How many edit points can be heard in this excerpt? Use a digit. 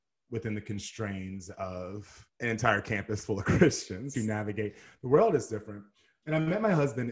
1